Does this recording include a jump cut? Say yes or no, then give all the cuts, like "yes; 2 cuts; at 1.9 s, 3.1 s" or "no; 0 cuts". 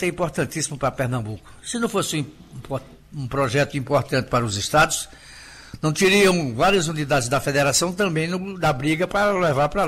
no; 0 cuts